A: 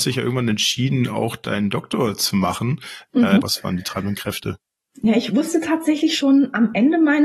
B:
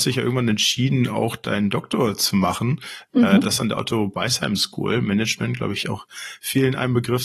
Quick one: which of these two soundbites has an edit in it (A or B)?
A